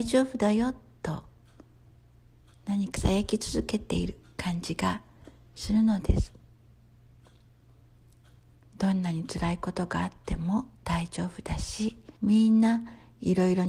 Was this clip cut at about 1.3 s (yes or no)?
no